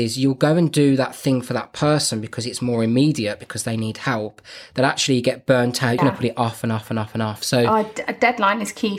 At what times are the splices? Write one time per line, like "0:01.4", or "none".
0:06.0